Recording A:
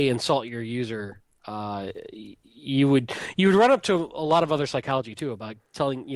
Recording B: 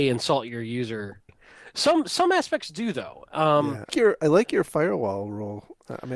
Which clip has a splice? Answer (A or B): B